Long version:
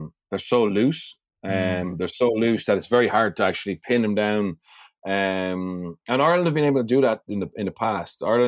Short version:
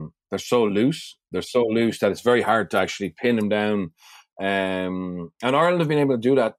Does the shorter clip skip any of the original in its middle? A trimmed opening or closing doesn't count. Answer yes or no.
yes